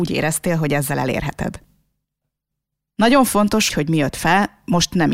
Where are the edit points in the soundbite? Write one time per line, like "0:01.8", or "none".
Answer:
0:03.7